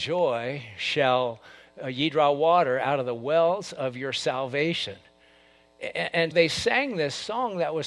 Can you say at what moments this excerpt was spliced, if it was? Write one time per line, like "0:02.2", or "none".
0:06.3